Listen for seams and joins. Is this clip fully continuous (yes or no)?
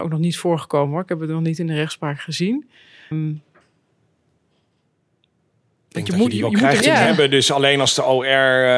no